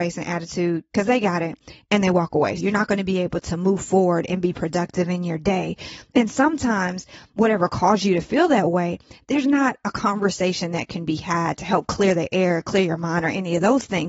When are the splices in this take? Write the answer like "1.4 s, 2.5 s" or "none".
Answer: 2.6 s